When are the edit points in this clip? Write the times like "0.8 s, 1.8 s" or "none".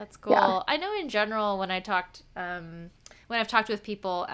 none